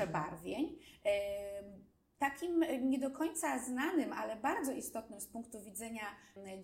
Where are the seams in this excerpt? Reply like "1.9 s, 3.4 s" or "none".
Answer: none